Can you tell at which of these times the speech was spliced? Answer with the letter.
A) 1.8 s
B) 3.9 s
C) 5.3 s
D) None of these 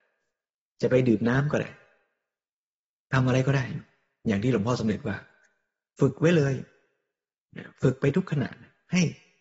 D